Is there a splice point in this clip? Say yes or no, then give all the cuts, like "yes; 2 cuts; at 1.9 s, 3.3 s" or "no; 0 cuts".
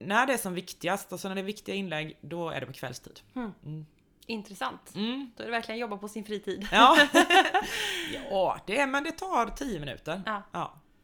no; 0 cuts